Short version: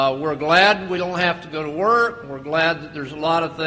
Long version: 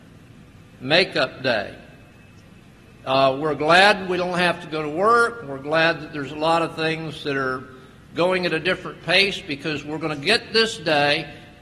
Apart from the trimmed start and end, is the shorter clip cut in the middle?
no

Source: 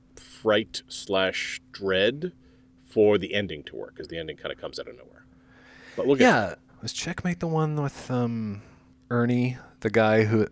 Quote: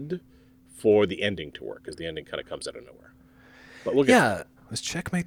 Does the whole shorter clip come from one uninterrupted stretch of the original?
yes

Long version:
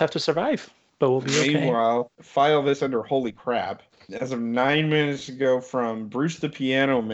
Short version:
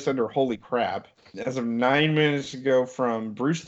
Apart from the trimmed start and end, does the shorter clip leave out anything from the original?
no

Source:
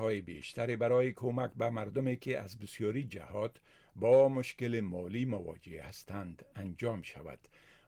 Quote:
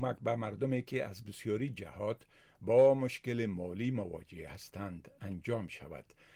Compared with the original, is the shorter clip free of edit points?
yes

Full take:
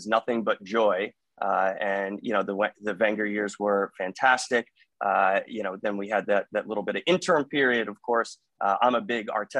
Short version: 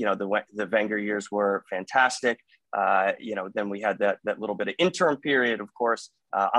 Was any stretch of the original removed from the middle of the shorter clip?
no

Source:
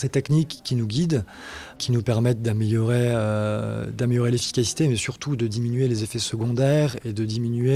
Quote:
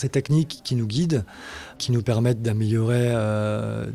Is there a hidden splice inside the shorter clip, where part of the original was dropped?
no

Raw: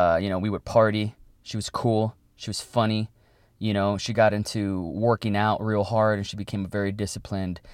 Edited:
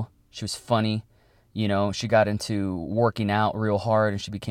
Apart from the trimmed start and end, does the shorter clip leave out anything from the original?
no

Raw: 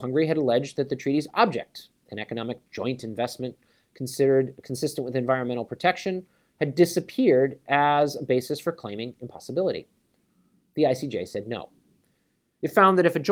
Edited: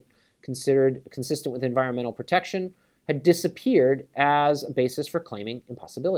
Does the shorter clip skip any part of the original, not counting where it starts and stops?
no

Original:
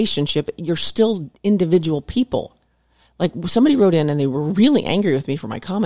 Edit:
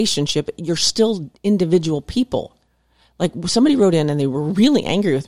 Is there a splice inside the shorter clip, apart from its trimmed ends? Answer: no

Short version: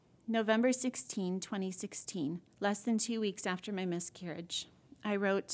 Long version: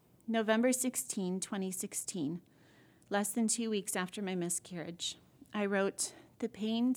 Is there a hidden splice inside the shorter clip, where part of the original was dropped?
yes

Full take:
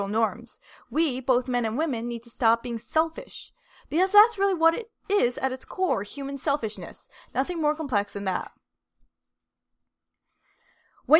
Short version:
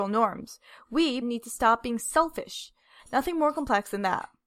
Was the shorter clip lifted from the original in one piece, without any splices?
no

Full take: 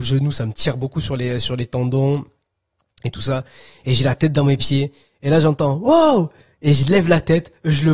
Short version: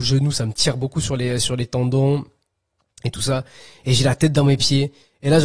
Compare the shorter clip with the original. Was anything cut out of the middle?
no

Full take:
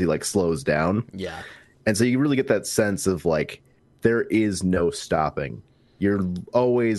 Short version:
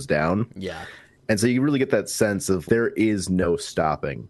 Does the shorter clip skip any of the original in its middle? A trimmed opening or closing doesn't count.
yes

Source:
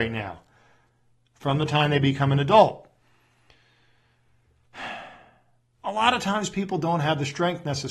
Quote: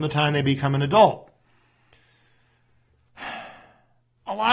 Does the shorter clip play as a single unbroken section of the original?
yes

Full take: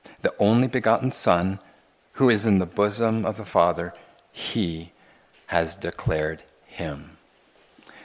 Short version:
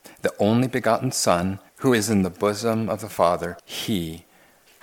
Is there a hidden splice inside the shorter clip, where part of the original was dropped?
yes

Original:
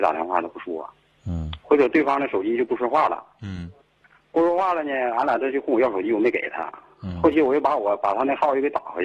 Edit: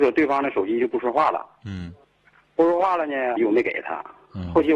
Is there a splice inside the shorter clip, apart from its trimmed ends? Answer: yes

